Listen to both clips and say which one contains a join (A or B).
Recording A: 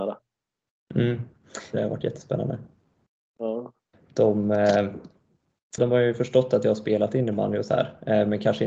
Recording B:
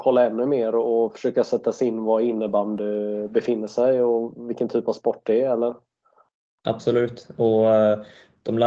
A